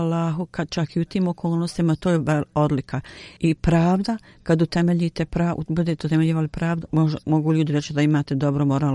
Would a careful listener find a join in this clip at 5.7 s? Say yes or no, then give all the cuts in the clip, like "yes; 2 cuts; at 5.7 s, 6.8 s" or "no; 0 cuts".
no; 2 cuts; at 3.4 s, 6.9 s